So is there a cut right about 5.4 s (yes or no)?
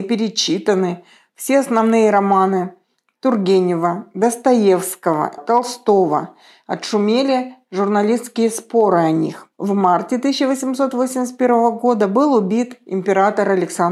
yes